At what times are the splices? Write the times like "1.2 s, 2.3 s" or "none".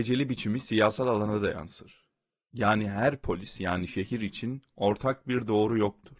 none